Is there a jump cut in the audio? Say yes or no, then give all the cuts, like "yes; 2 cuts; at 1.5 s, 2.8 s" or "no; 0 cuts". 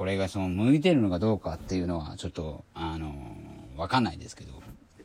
no; 0 cuts